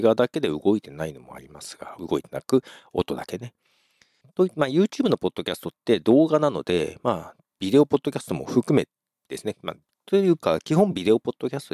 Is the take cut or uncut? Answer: cut